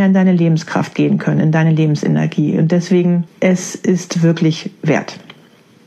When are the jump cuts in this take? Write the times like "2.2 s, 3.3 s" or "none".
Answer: none